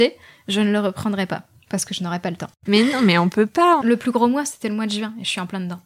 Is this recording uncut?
no; 2 cuts; at 2.7 s, 3.8 s

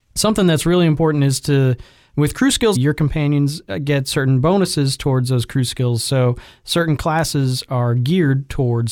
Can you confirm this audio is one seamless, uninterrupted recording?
no; 1 cut; at 2.7 s

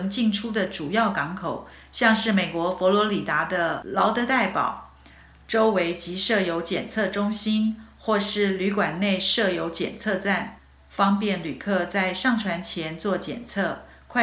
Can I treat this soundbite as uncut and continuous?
yes; 0 cuts

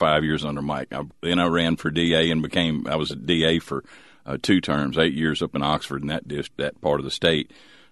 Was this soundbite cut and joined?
no; 0 cuts

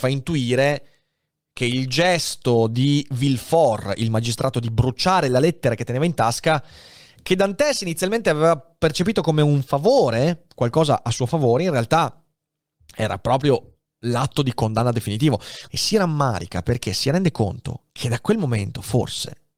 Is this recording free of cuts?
no; 2 cuts; at 15.7 s, 17.9 s

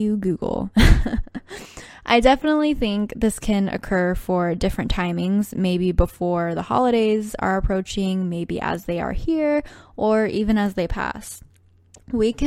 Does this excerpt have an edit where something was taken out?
no; 0 cuts

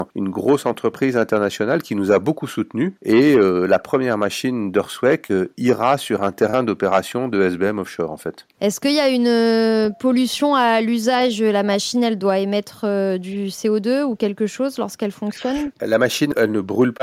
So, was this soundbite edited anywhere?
no; 0 cuts

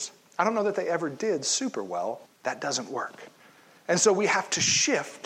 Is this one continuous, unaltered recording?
no; 1 cut; at 2.3 s

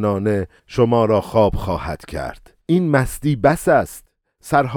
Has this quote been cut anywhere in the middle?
yes; 1 cut; at 2.6 s

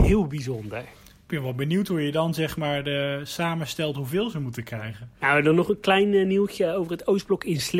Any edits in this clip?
yes; 1 cut; at 5.1 s

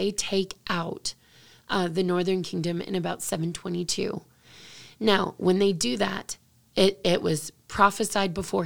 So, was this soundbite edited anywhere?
no; 0 cuts

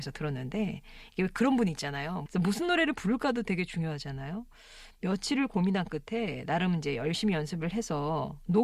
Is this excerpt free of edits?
no; 1 cut; at 2.3 s

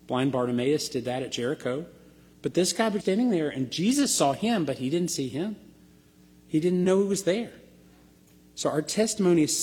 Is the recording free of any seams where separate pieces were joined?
no; 2 cuts; at 3.0 s, 6.8 s

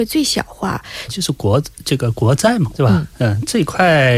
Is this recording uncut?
no; 2 cuts; at 1.1 s, 2.7 s

